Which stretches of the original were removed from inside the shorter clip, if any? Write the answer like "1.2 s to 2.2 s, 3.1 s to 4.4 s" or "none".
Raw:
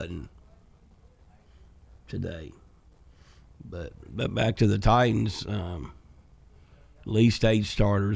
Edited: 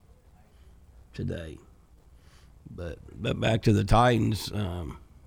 none